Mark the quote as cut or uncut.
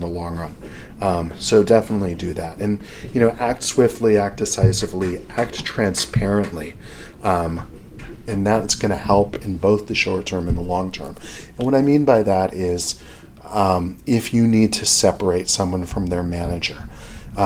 uncut